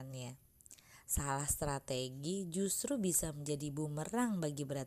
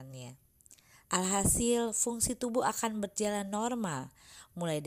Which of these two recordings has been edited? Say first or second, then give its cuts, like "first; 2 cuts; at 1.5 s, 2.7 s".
second; 1 cut; at 1.0 s